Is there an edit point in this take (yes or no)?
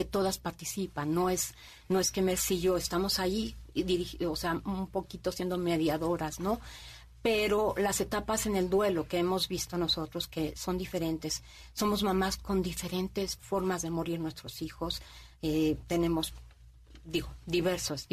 no